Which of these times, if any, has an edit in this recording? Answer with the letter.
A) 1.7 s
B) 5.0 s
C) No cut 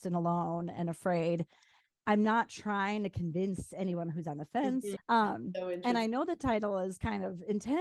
B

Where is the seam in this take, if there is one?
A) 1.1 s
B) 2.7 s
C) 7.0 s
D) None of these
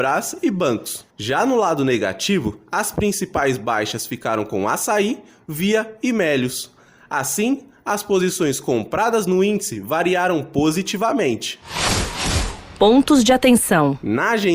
A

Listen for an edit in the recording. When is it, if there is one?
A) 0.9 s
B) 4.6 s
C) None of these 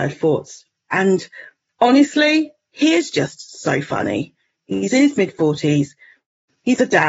A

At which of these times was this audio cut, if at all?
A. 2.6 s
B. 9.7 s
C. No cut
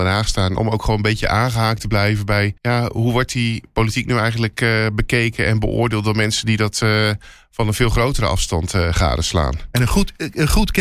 A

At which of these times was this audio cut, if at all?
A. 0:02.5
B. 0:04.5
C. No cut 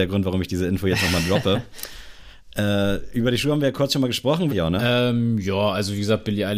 B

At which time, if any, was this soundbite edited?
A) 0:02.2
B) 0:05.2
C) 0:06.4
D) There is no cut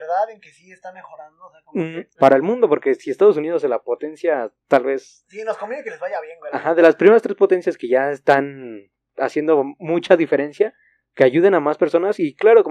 A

